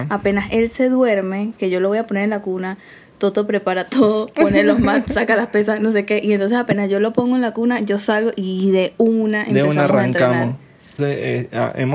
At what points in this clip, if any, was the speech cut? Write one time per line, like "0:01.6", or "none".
0:11.0

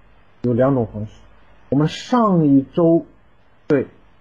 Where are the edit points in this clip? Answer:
none

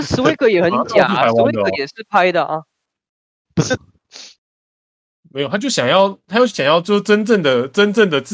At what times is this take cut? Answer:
0:03.8

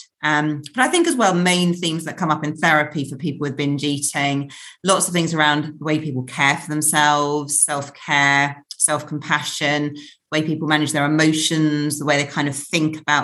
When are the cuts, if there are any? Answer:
none

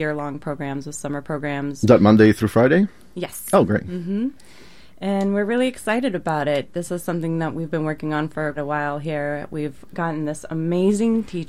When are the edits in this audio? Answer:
0:08.6
0:09.9

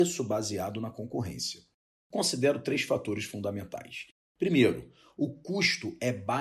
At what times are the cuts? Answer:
0:02.0

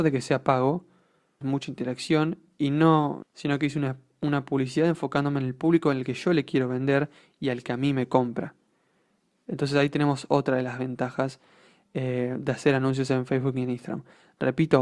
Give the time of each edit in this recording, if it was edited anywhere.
0:01.4
0:03.2

